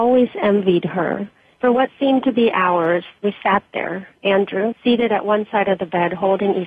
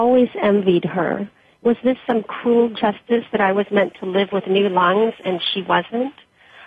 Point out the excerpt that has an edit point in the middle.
first; 2 cuts; at 1.6 s, 4.7 s

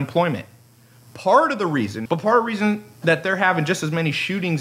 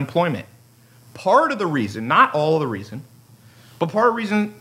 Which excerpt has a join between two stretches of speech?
first; 1 cut; at 2.1 s

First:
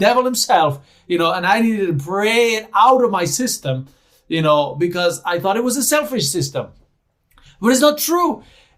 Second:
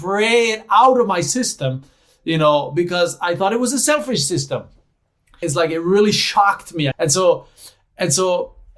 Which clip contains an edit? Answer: second; 2 cuts; at 5.4 s, 6.9 s

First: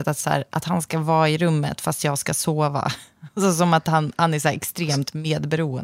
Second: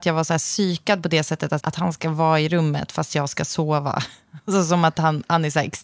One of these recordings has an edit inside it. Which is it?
second; 1 cut; at 1.6 s

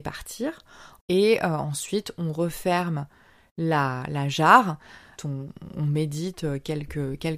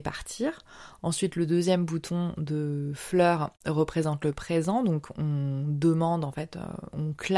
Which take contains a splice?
first; 2 cuts; at 1.0 s, 5.2 s

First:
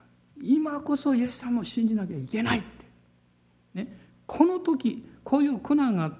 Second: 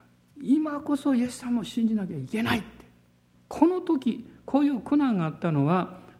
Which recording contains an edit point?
second; 1 cut; at 3.3 s

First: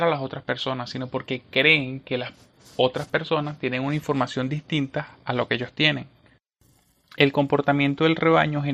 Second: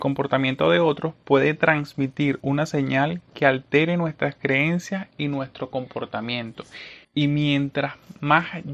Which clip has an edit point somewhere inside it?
second; 1 cut; at 7.0 s

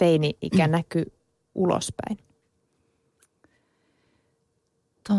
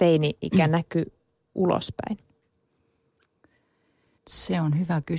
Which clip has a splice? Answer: second; 1 cut; at 4.2 s

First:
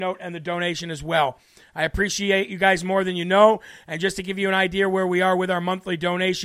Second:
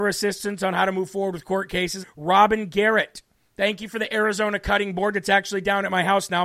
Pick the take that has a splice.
second; 1 cut; at 2.0 s

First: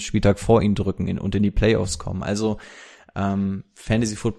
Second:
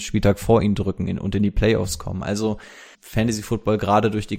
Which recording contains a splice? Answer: second; 1 cut; at 2.9 s

